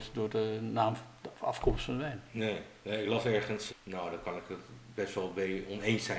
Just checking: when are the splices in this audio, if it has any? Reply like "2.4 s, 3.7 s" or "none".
3.7 s

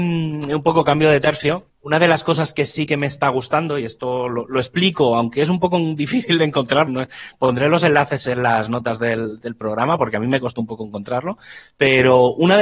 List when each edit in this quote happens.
1.7 s, 6.9 s

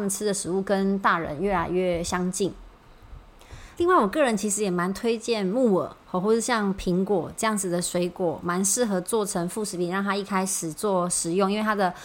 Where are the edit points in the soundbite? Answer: 3.8 s

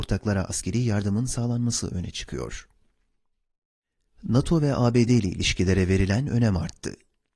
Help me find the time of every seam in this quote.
none

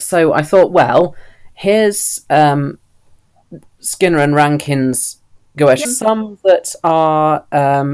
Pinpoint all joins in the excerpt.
5.8 s

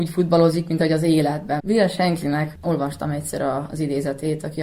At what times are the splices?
1.6 s

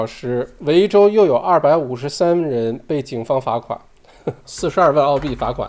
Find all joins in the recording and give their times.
4.4 s

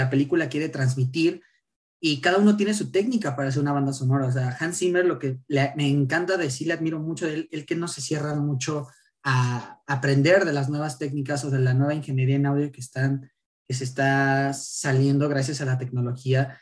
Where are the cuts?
none

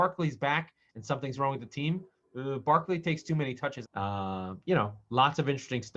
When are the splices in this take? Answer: 3.8 s

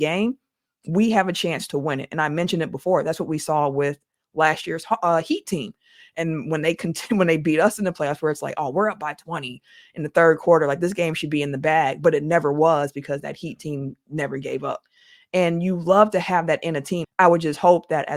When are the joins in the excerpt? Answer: 17.0 s

